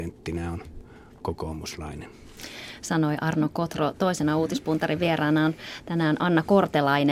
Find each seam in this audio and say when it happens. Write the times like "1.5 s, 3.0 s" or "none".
none